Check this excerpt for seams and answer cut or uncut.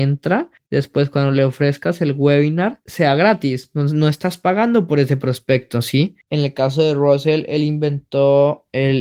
cut